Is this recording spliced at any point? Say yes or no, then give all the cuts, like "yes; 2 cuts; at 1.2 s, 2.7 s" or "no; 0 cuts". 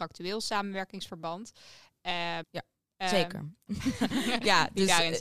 yes; 2 cuts; at 2.4 s, 3.7 s